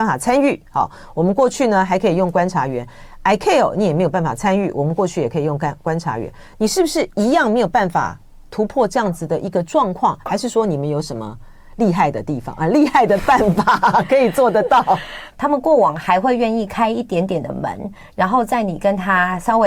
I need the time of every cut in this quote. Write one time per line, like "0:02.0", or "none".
0:15.3